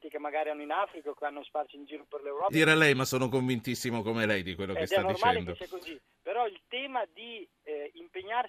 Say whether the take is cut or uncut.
cut